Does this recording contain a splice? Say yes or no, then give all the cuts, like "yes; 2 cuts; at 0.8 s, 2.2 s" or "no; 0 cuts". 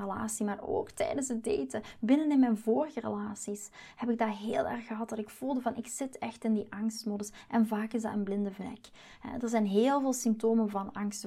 no; 0 cuts